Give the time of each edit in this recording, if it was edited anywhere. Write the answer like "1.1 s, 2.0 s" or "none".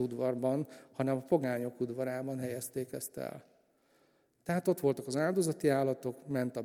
none